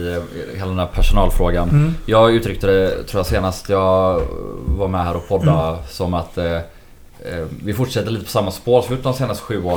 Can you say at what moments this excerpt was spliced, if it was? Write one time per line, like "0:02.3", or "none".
none